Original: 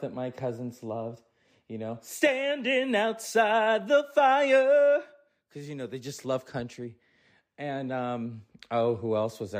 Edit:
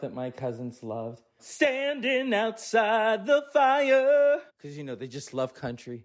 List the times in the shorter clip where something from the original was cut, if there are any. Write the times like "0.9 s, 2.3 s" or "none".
1.4 s, 4.5 s